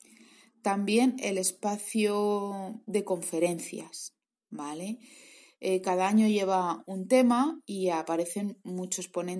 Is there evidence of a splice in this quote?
no; 0 cuts

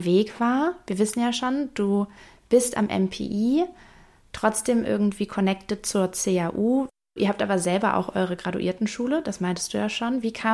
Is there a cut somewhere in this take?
no; 0 cuts

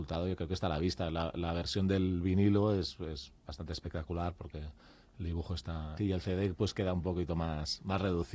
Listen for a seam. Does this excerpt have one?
yes; 1 cut; at 6.0 s

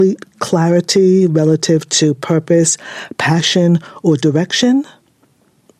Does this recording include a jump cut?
no; 0 cuts

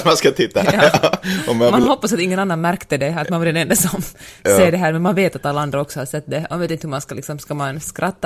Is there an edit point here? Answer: no; 0 cuts

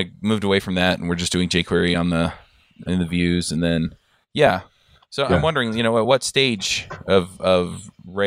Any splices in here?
no; 0 cuts

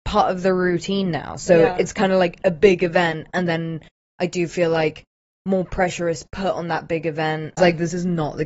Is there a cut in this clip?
yes; 1 cut; at 7.6 s

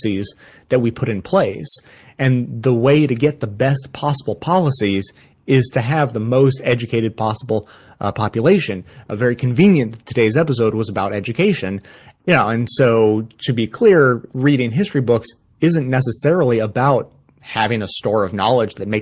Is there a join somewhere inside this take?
no; 0 cuts

